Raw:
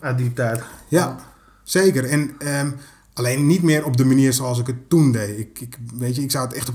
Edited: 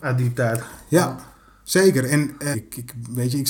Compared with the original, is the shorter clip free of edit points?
no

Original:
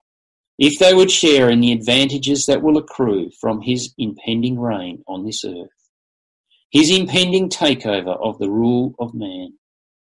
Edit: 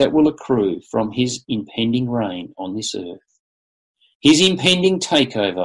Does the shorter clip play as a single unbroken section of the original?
yes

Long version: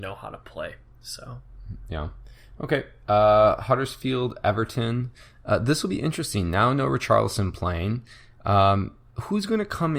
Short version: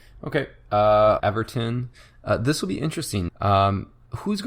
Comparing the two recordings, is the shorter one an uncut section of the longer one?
no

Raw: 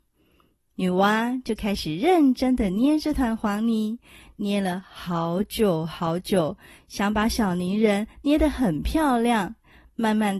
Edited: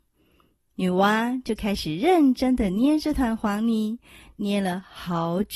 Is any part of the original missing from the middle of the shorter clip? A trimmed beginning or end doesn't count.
no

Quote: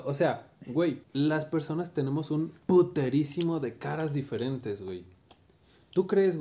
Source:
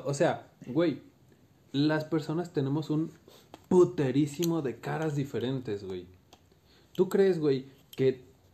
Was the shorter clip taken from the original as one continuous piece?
no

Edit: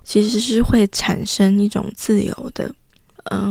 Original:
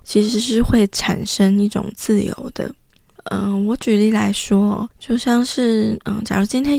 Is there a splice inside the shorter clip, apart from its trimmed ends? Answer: no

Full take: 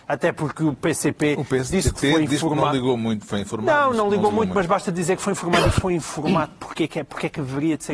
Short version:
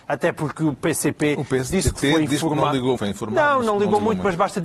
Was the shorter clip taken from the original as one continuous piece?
no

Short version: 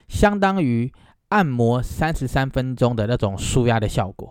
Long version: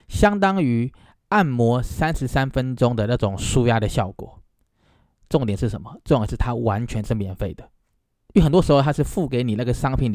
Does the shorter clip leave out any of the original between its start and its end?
no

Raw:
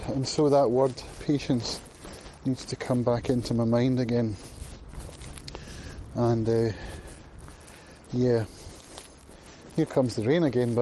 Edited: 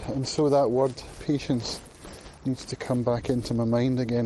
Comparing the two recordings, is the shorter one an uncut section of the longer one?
yes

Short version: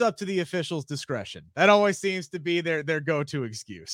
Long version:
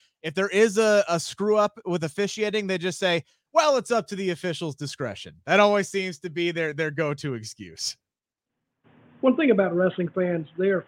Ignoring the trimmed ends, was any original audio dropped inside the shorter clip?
no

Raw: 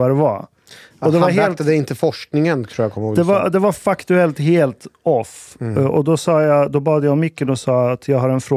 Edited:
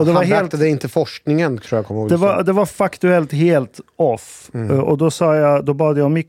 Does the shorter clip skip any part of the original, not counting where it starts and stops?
no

